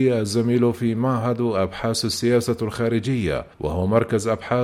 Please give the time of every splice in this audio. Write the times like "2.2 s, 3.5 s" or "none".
3.5 s